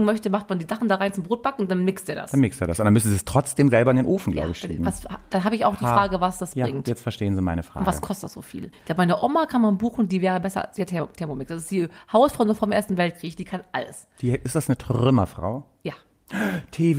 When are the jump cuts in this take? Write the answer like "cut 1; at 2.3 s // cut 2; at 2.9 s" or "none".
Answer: cut 1; at 8.7 s

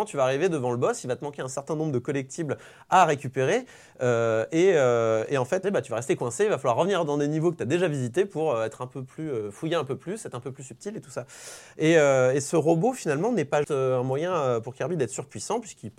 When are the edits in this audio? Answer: cut 1; at 5.6 s // cut 2; at 13.6 s

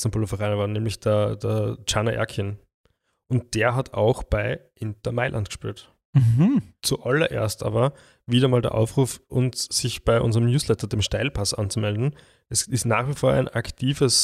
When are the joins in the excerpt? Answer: cut 1; at 6.8 s

